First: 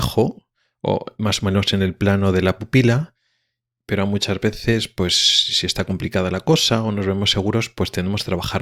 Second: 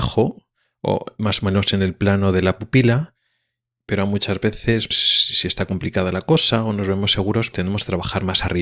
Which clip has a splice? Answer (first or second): second